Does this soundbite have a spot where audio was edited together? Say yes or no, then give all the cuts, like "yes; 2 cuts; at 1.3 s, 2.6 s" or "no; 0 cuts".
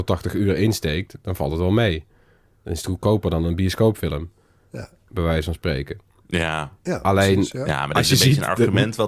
no; 0 cuts